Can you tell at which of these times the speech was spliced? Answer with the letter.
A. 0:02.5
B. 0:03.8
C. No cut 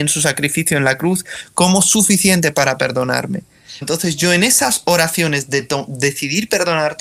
B